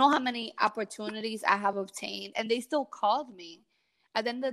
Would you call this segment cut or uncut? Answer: cut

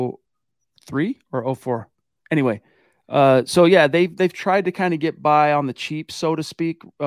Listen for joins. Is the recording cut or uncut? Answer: uncut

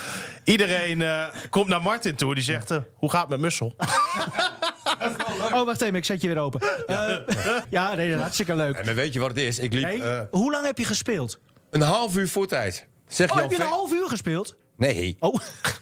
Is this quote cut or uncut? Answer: cut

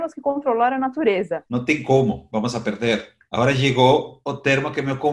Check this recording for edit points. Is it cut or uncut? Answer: cut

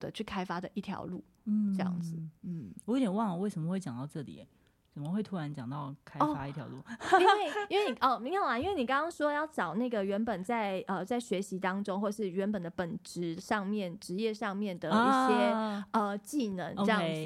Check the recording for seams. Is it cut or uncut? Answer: uncut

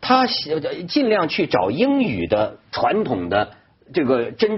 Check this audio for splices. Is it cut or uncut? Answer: uncut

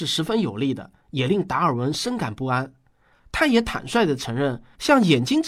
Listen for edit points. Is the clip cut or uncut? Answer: cut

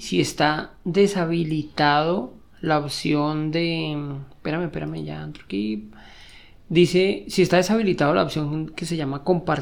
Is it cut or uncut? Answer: uncut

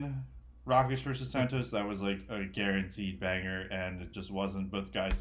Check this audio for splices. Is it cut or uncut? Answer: uncut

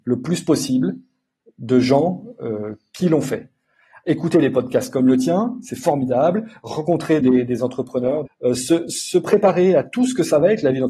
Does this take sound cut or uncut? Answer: cut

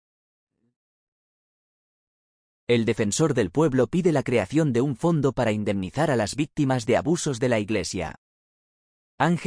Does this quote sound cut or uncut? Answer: uncut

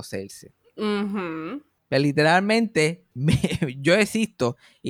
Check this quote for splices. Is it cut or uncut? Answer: cut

